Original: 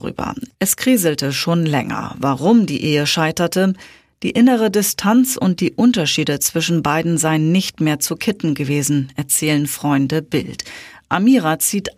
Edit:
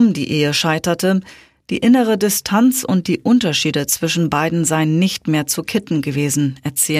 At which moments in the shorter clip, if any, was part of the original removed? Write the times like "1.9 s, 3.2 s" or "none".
none